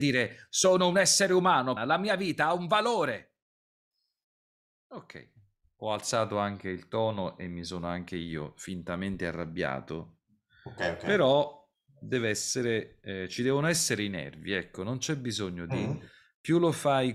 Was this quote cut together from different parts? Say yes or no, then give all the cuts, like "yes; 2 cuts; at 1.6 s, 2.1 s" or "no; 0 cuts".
yes; 1 cut; at 1.8 s